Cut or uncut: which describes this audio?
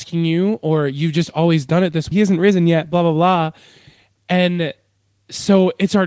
cut